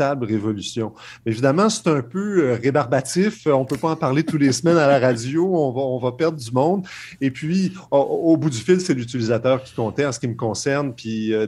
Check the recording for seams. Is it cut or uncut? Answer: uncut